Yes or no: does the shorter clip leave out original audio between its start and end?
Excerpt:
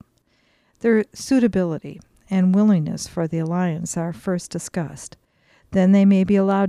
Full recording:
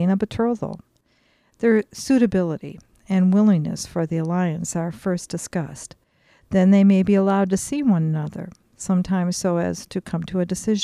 no